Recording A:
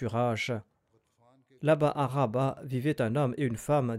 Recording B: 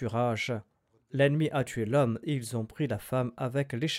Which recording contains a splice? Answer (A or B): B